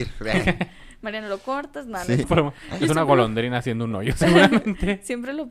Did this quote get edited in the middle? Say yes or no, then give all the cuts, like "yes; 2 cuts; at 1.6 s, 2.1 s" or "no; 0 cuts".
yes; 1 cut; at 2.2 s